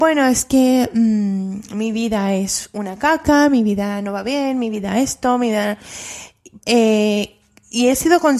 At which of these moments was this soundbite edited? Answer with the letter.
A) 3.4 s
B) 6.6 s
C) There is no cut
B